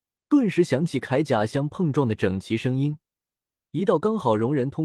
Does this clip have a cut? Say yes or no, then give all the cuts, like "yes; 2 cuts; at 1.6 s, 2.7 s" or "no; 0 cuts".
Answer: no; 0 cuts